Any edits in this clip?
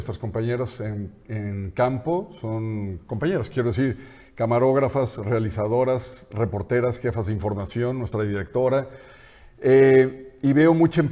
no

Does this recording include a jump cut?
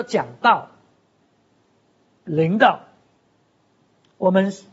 no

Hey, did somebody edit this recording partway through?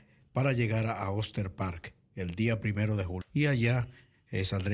yes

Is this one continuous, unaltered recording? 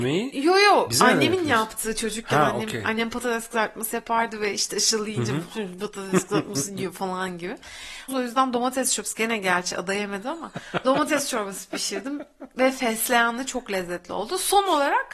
no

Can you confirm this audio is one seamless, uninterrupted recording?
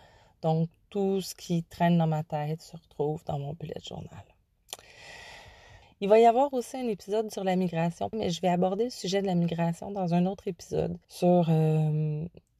no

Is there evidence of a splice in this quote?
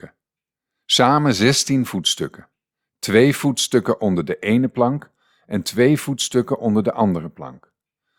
no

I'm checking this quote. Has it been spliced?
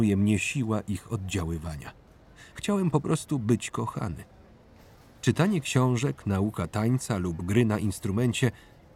yes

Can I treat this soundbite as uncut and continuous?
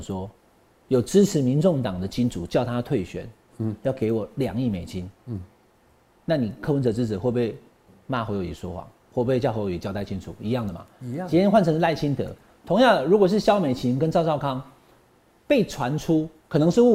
no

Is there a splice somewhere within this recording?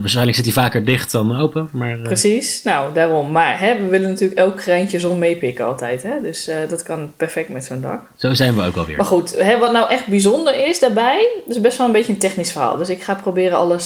no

